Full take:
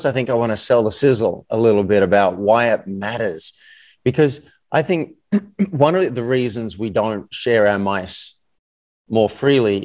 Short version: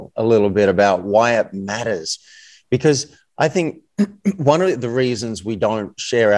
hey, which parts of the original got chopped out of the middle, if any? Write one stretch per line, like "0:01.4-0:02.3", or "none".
none